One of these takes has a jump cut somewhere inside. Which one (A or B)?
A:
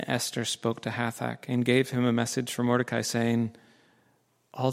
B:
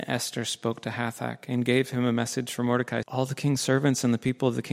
B